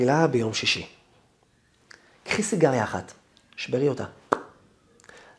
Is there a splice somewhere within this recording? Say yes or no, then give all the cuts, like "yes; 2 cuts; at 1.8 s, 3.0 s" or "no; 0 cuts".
no; 0 cuts